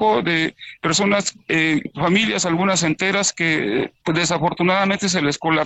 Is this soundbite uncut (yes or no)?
yes